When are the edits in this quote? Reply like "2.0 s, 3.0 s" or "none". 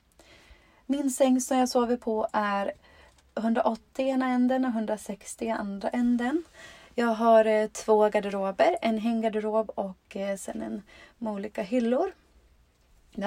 none